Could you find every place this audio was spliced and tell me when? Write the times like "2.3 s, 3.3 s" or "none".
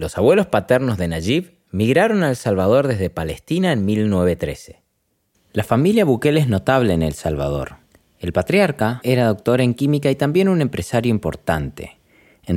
5.3 s, 9.0 s